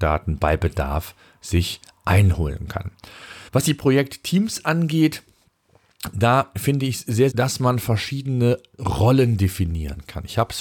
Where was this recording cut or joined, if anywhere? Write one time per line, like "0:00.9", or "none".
0:03.5
0:07.3